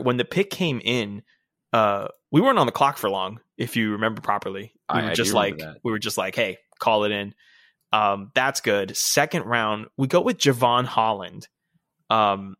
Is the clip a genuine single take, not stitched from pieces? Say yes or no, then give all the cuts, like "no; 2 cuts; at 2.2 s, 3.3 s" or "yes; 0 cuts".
yes; 0 cuts